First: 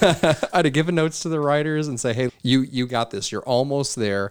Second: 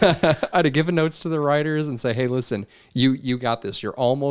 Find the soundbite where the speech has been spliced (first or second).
first